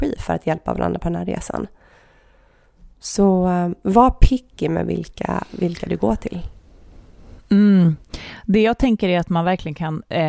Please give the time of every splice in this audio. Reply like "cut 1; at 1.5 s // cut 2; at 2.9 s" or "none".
cut 1; at 2.9 s